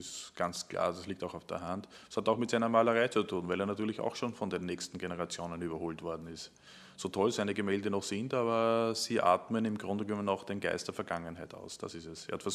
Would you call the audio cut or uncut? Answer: uncut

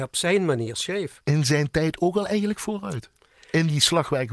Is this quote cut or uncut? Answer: uncut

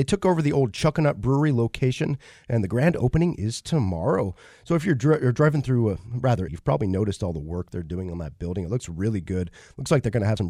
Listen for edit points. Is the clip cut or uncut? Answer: cut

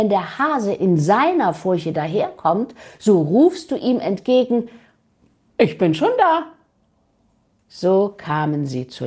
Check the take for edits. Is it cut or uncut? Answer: uncut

